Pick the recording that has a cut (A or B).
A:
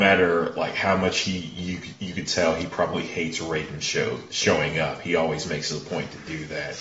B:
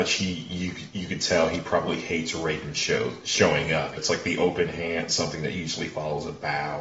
B